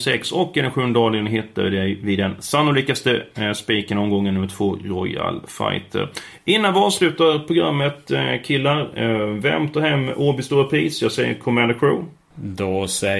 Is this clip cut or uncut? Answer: uncut